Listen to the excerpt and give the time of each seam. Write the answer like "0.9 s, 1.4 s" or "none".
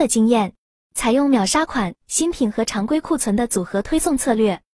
none